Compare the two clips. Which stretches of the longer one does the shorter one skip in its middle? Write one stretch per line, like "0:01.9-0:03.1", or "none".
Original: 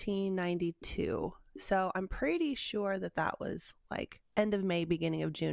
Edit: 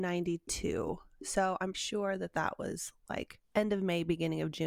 0:02.1-0:02.6